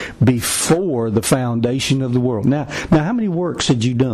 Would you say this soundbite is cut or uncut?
uncut